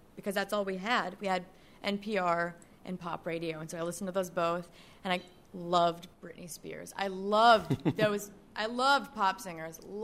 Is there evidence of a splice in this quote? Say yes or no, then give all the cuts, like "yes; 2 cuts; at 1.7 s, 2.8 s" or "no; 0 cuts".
no; 0 cuts